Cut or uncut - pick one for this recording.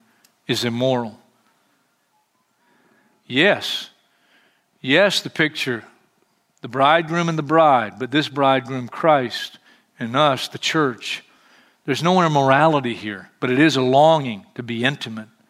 uncut